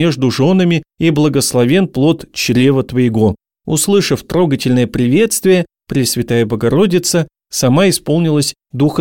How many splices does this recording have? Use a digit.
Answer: 1